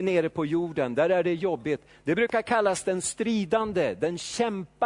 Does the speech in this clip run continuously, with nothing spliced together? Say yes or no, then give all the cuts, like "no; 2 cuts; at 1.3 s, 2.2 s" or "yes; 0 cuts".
yes; 0 cuts